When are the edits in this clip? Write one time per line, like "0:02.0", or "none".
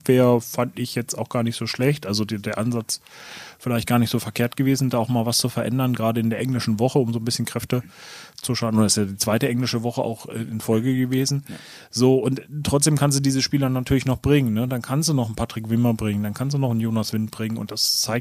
none